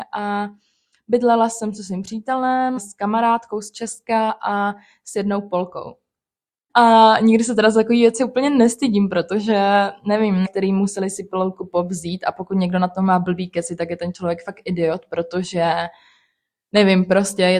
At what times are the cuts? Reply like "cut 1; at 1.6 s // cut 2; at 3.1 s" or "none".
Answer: cut 1; at 2.8 s // cut 2; at 6.7 s // cut 3; at 10.4 s

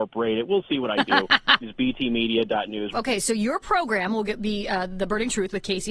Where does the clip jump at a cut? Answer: cut 1; at 1.6 s // cut 2; at 2.9 s

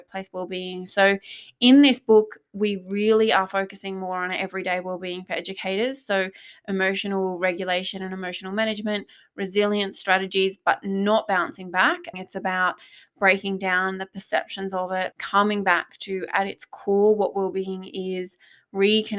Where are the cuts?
cut 1; at 12.1 s // cut 2; at 15.1 s

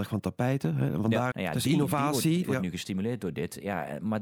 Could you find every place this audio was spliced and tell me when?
cut 1; at 1.3 s // cut 2; at 2.4 s

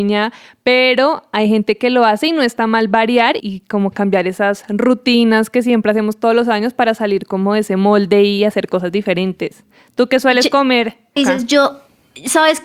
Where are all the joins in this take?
cut 1; at 3.4 s // cut 2; at 11.2 s

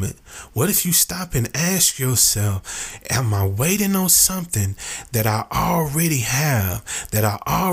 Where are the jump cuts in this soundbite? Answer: none

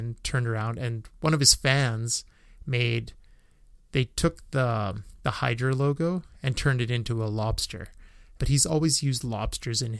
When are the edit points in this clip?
cut 1; at 8.4 s

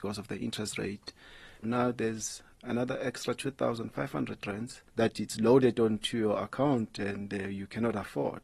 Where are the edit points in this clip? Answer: cut 1; at 1.6 s // cut 2; at 4.9 s

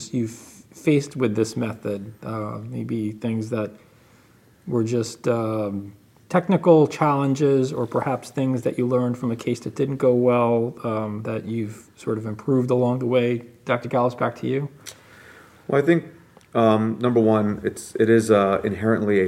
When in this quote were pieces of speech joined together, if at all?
none

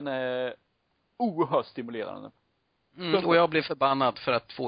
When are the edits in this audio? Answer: none

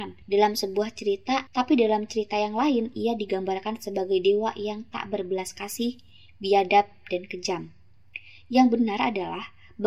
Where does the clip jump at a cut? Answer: cut 1; at 1.5 s

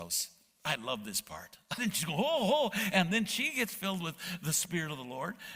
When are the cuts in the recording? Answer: cut 1; at 1.8 s

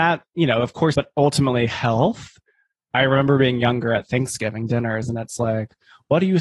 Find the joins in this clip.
cut 1; at 0.9 s

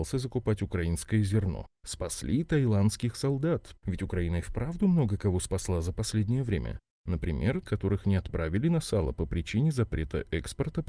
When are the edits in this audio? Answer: cut 1; at 3.7 s // cut 2; at 7.6 s

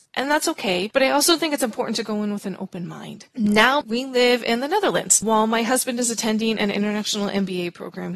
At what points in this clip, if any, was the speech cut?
cut 1; at 3.8 s

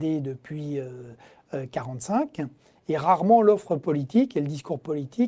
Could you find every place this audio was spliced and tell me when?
none

